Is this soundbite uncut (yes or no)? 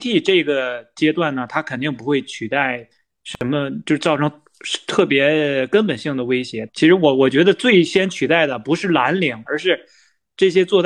no